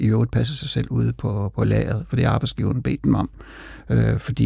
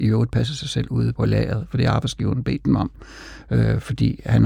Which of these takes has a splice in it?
second; 1 cut; at 1.1 s

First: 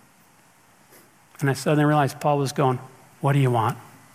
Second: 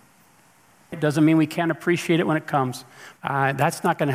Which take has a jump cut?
second; 2 cuts; at 0.9 s, 3.2 s

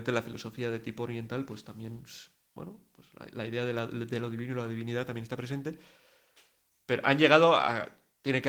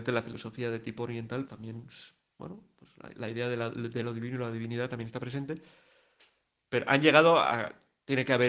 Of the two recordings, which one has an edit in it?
second; 1 cut; at 1.5 s

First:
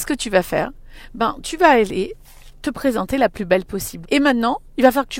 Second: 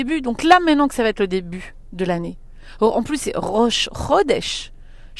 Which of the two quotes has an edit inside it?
first; 1 cut; at 4.0 s

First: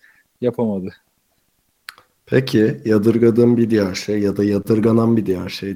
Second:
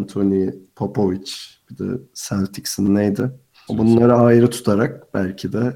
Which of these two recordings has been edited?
second; 1 cut; at 3.7 s

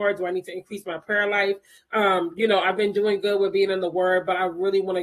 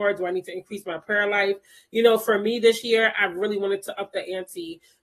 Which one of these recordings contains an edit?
first; 1 cut; at 1.8 s

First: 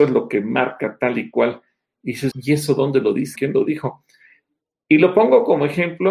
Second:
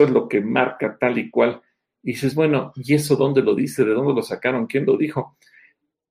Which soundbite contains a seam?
first; 2 cuts; at 2.3 s, 3.4 s

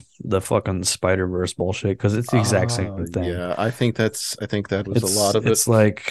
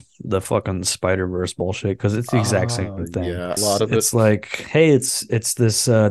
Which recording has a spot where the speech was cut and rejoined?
second; 1 cut; at 3.6 s

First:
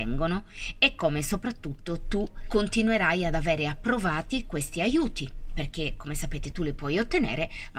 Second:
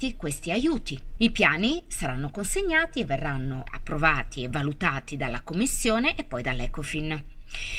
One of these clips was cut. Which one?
second; 1 cut; at 1.2 s

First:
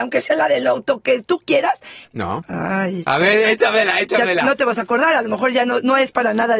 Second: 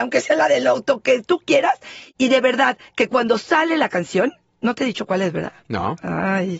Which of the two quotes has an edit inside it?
first; 1 cut; at 2.0 s

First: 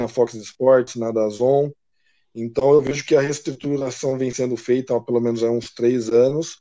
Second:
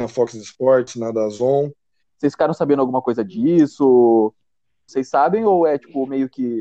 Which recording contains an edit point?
second; 2 cuts; at 2.0 s, 4.9 s

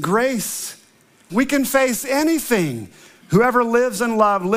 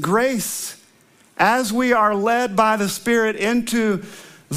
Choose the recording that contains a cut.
first; 2 cuts; at 1.3 s, 3.2 s

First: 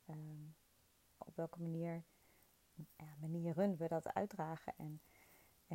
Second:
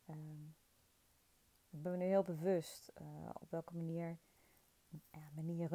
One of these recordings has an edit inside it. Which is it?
first; 2 cuts; at 1.2 s, 4.7 s

